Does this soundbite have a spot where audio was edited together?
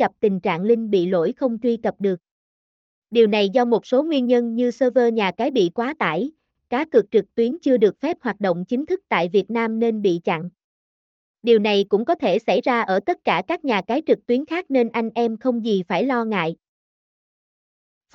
yes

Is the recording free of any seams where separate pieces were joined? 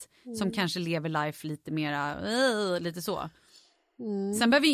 yes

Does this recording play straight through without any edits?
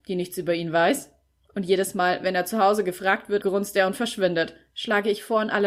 no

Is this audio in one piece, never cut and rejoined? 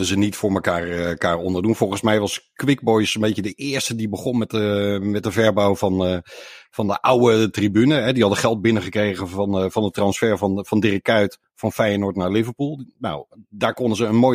yes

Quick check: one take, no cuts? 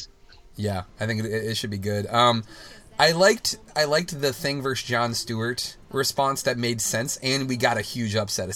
no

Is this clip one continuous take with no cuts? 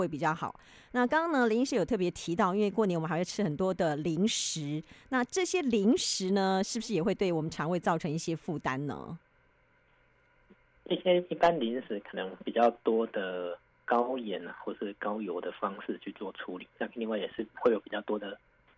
yes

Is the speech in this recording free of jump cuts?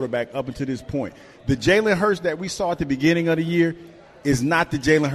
yes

